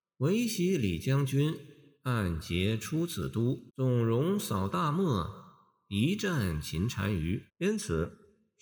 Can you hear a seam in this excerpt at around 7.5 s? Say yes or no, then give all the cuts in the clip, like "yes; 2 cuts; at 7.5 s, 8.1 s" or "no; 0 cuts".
yes; 2 cuts; at 3.7 s, 7.5 s